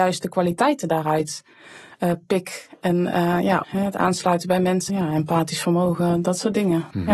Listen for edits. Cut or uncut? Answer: cut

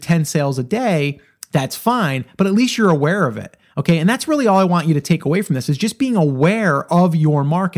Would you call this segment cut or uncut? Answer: uncut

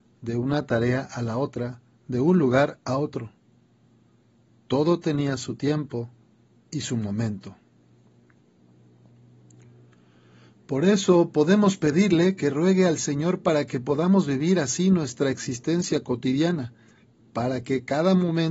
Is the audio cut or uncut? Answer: uncut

